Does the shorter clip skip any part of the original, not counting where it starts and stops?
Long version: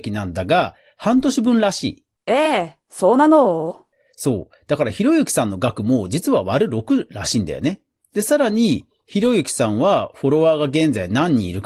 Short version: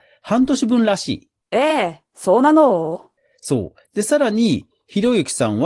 yes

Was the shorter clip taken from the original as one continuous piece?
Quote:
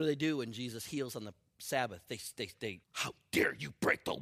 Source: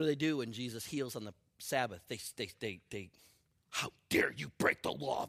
no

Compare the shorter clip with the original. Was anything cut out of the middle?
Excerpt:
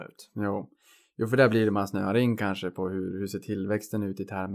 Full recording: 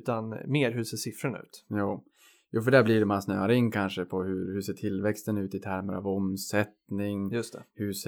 no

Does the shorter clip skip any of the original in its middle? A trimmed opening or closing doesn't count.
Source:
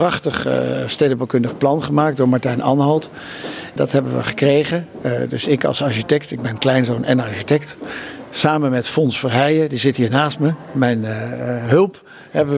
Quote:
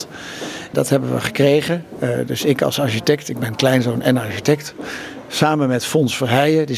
no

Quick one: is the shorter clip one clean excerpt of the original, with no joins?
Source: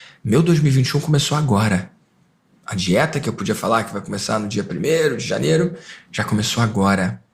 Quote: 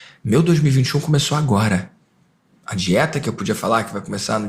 yes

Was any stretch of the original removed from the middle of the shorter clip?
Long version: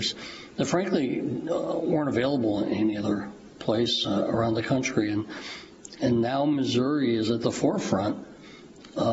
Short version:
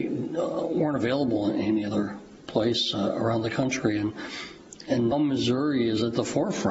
yes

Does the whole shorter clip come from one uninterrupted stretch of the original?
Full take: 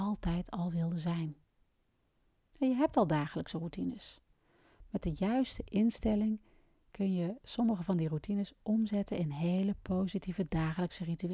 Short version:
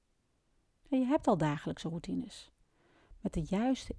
yes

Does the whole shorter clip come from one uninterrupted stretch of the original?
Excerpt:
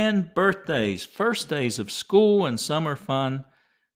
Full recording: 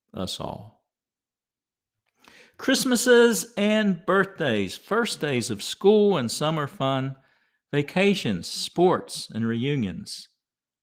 yes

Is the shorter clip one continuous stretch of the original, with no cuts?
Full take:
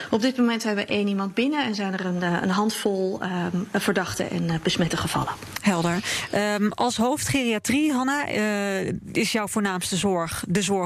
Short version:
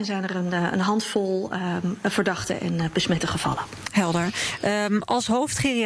yes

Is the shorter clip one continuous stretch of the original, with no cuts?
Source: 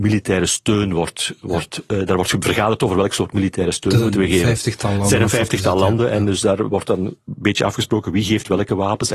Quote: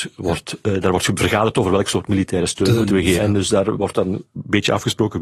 no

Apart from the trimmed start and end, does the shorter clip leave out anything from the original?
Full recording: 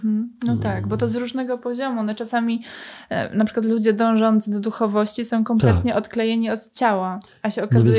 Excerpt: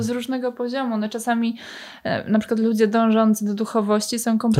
no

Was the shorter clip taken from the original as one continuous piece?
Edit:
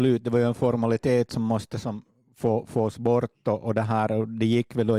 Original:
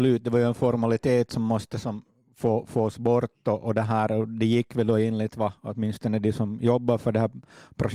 yes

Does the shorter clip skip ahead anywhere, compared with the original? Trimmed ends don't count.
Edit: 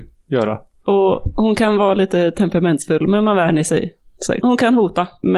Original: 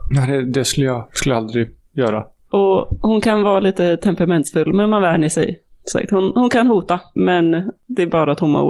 yes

